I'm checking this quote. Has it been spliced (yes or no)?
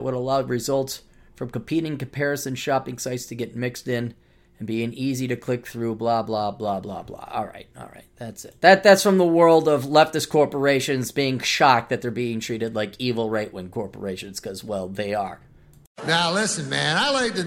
no